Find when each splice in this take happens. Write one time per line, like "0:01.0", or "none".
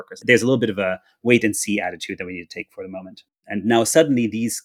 0:03.4